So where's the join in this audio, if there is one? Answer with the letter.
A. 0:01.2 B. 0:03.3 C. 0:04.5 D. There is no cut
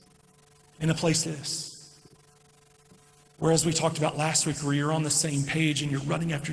A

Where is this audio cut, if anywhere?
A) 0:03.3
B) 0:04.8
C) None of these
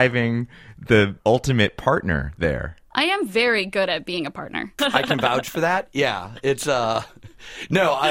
B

